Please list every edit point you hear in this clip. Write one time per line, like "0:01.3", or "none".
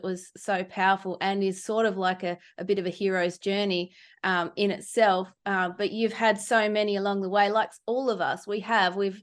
none